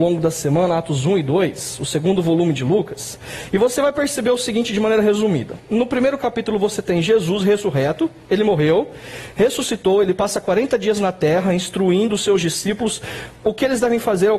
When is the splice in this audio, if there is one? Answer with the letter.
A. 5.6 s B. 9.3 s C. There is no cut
C